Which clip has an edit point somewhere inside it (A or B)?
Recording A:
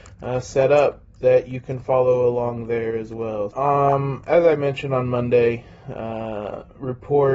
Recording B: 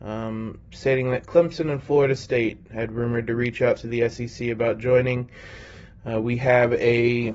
A